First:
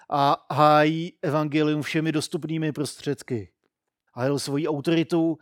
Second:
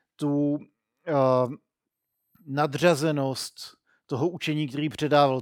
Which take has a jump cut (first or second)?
first